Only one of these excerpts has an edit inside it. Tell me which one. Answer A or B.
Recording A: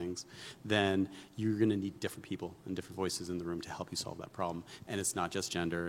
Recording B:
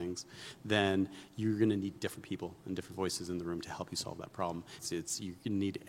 B